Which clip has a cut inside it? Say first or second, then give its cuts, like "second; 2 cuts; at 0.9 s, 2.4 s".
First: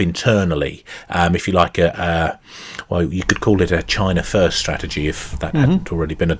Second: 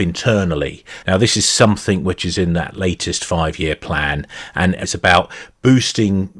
second; 2 cuts; at 1.0 s, 4.8 s